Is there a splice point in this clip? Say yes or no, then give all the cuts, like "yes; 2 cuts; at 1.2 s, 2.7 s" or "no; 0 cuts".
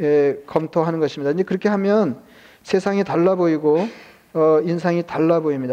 no; 0 cuts